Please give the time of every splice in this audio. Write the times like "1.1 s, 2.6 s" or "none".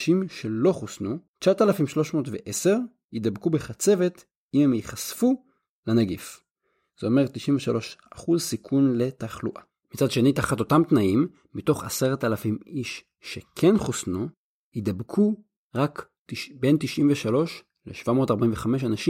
1.3 s